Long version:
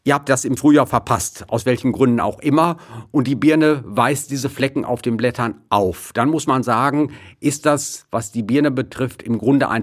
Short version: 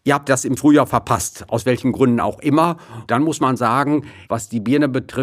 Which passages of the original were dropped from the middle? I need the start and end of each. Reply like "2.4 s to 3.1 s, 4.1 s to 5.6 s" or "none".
3.1 s to 6.1 s, 7.3 s to 8.1 s